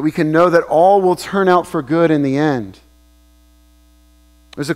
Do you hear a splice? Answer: no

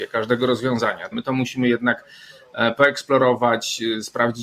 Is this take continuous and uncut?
no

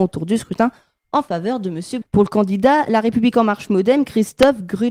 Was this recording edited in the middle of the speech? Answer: yes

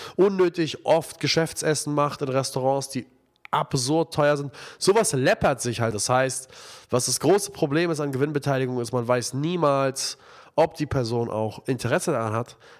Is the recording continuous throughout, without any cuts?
no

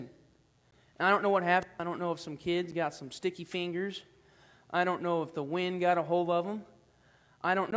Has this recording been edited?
no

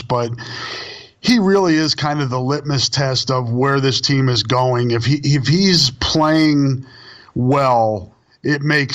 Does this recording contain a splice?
no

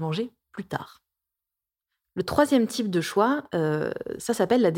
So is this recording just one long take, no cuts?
yes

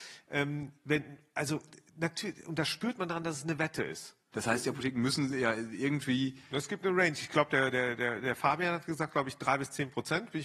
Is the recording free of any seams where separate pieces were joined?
no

